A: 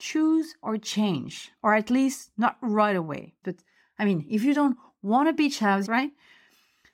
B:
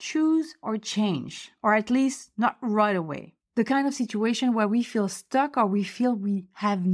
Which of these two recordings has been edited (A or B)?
A